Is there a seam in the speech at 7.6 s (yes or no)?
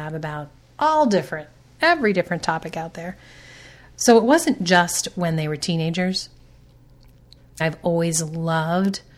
yes